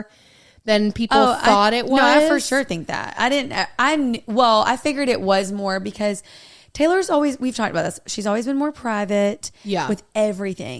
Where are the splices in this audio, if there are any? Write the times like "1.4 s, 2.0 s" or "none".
none